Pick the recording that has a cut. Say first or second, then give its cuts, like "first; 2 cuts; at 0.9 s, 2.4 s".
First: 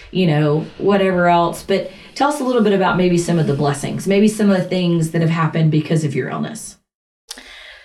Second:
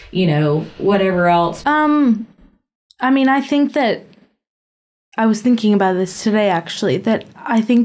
second; 1 cut; at 1.6 s